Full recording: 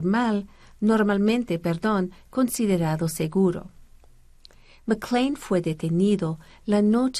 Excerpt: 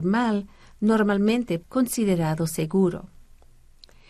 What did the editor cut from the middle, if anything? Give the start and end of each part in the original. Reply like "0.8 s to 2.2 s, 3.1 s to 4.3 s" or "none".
1.6 s to 2.2 s